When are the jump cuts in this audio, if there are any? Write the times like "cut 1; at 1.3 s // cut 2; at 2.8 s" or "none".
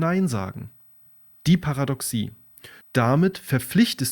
cut 1; at 1.3 s // cut 2; at 2.8 s